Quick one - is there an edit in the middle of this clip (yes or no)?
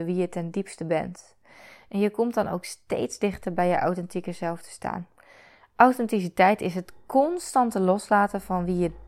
no